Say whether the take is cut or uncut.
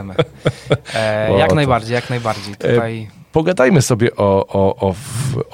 uncut